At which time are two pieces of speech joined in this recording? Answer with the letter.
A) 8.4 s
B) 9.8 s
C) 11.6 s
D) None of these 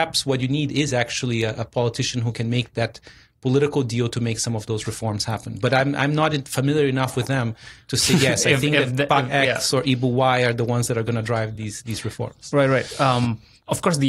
D